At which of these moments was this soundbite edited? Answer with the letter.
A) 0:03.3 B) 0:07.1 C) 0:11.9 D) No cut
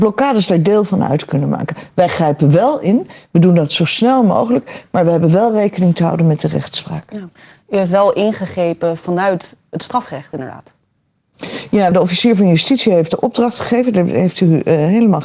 C